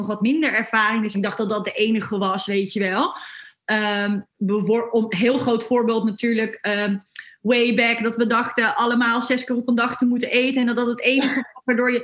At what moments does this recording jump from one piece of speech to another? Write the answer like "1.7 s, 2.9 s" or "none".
1.1 s